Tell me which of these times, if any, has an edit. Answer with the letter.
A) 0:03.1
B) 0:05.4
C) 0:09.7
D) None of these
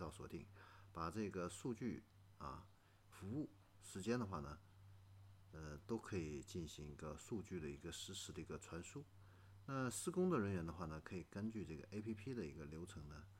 A